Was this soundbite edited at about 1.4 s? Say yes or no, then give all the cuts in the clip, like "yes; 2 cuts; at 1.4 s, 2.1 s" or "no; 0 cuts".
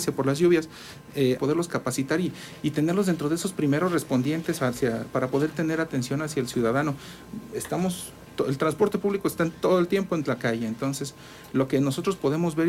yes; 1 cut; at 1.4 s